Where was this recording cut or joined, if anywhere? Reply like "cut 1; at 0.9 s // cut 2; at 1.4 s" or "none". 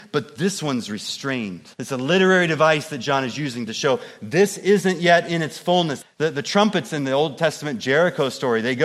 cut 1; at 1.7 s // cut 2; at 6.0 s